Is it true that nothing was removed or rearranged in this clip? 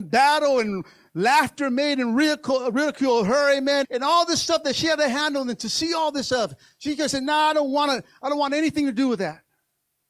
no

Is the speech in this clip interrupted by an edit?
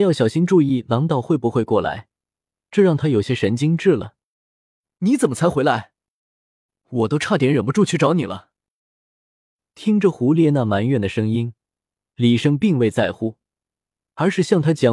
no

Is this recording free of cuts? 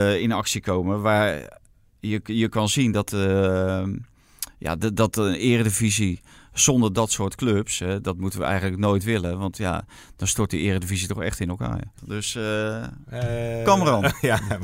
no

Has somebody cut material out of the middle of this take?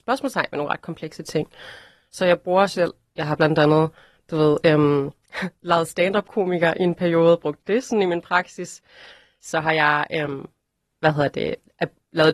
no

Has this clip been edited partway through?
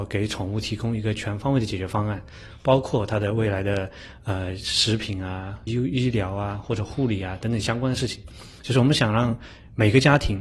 yes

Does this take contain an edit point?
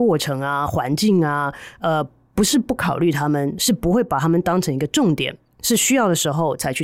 no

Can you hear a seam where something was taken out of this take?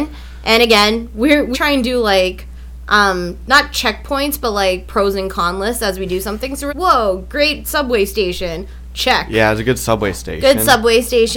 yes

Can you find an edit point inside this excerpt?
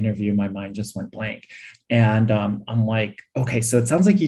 no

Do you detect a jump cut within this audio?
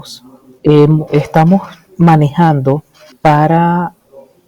no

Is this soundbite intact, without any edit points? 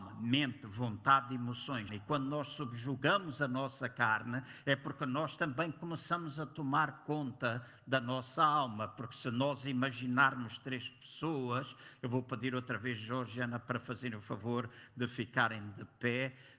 no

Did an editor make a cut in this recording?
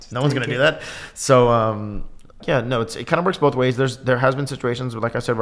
yes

